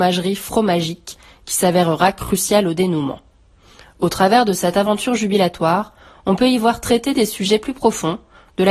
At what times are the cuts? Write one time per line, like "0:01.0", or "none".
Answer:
none